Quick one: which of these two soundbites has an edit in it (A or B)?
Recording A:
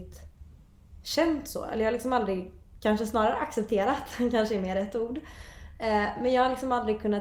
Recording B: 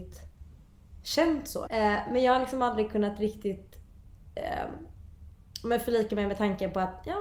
B